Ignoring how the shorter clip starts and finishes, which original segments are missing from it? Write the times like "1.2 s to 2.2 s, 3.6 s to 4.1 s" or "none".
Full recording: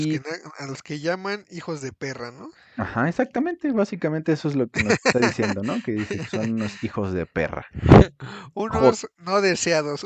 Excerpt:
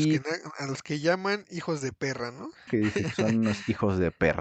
2.7 s to 5.8 s